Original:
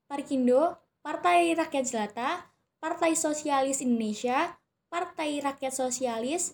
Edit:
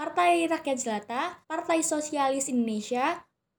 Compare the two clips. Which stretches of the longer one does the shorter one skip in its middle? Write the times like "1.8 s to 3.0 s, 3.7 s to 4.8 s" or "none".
2.5 s to 2.8 s